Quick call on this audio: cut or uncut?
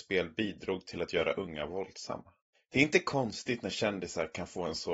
cut